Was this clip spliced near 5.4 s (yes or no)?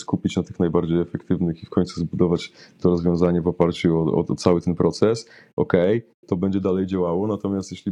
no